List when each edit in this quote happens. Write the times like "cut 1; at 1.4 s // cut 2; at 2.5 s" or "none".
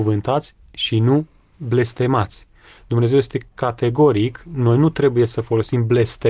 none